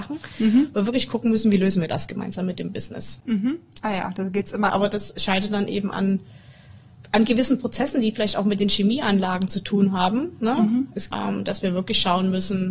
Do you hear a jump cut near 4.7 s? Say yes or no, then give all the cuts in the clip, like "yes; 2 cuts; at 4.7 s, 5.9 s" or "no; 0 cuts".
yes; 2 cuts; at 4.7 s, 11.1 s